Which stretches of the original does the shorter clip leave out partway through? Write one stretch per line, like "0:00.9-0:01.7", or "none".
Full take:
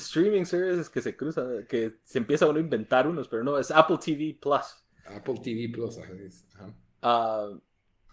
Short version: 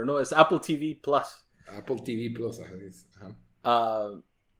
none